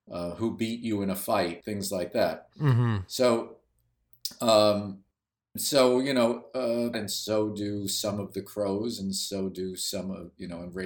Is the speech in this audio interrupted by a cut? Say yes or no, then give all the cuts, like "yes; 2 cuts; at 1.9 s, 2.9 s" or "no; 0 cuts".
yes; 2 cuts; at 1.6 s, 6.9 s